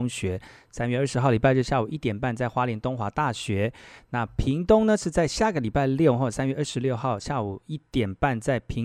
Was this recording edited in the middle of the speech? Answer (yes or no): no